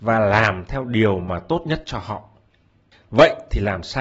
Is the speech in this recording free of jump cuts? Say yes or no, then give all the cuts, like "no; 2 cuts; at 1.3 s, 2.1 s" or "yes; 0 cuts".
yes; 0 cuts